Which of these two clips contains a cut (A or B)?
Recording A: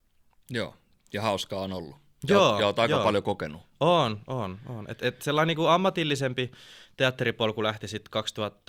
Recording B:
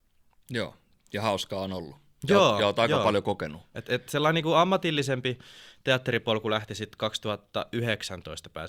B